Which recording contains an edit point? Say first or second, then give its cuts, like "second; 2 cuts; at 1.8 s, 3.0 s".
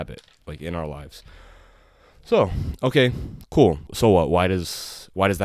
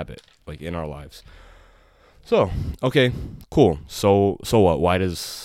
first; 1 cut; at 3.9 s